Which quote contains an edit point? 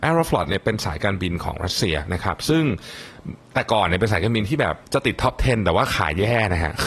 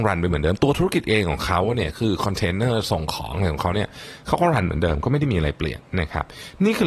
first; 1 cut; at 4.8 s

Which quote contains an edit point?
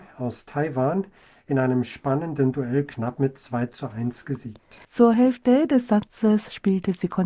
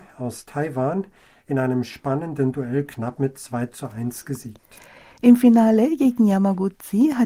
first; 1 cut; at 4.8 s

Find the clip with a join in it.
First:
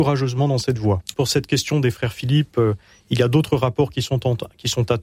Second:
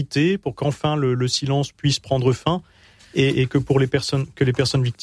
first; 1 cut; at 1.1 s

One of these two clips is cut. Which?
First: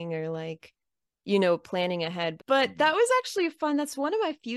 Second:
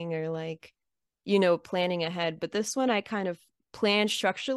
first; 1 cut; at 2.4 s

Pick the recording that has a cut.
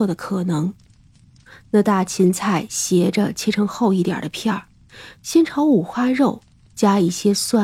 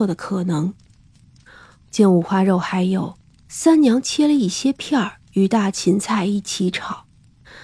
first; 1 cut; at 1.5 s

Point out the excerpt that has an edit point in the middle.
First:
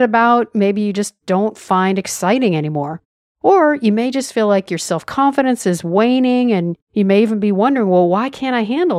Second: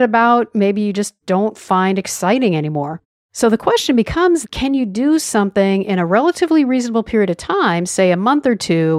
second; 2 cuts; at 3.2 s, 4.4 s

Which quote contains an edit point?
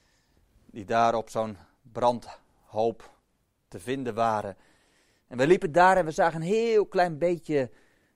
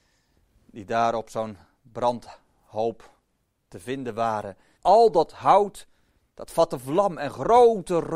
second; 1 cut; at 4.8 s

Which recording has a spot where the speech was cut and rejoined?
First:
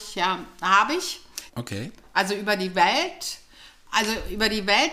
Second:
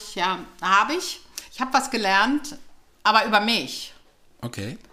first; 1 cut; at 1.5 s

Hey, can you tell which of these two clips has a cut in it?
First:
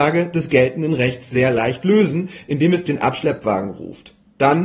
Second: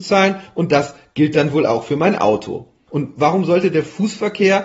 second; 1 cut; at 2.9 s

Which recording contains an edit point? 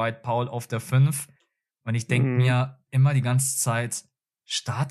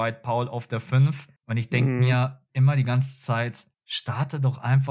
second; 2 cuts; at 1.4 s, 3.7 s

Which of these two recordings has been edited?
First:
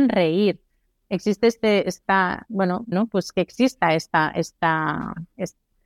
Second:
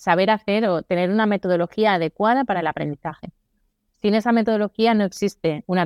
first; 1 cut; at 2.9 s

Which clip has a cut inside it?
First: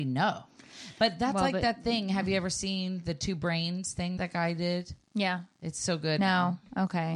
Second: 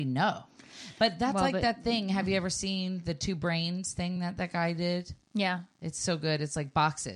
first; 2 cuts; at 4.2 s, 6.2 s

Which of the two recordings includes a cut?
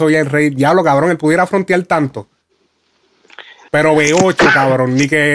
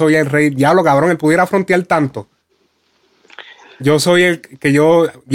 first; 1 cut; at 3.7 s

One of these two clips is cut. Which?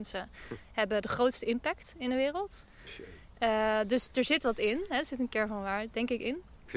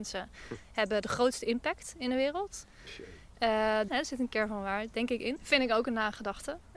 second; 2 cuts; at 3.9 s, 5.4 s

